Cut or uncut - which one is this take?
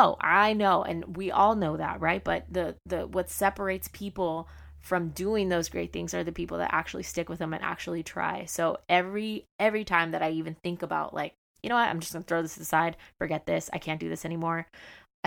uncut